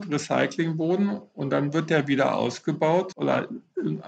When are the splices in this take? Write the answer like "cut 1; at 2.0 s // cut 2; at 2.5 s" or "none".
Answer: cut 1; at 3.1 s